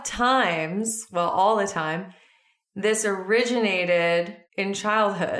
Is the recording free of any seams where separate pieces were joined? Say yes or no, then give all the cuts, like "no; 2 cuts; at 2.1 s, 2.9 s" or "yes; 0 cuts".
no; 1 cut; at 4.5 s